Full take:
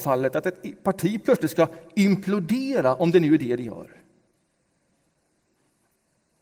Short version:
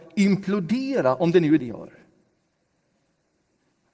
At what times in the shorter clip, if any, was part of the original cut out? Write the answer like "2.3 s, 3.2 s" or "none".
1.6 s